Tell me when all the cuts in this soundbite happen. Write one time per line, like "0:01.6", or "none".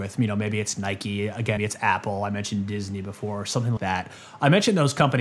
0:01.6
0:03.8